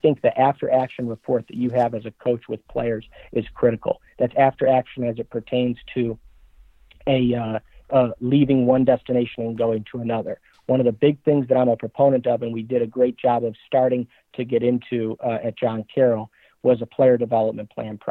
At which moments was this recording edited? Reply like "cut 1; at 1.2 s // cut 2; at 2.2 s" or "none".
cut 1; at 4.1 s // cut 2; at 8.2 s

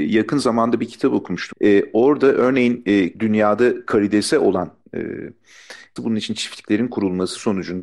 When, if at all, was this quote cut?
cut 1; at 1.5 s // cut 2; at 3.1 s // cut 3; at 6.0 s

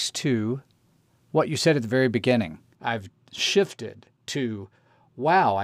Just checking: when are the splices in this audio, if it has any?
cut 1; at 2.7 s

